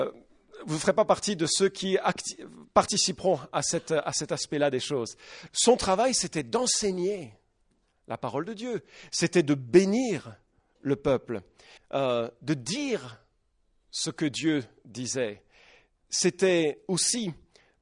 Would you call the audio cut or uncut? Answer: cut